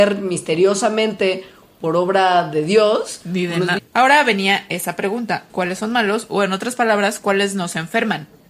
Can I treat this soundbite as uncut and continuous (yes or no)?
no